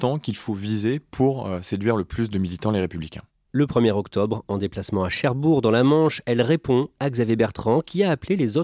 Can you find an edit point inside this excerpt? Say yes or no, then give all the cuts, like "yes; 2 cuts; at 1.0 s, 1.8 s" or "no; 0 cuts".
no; 0 cuts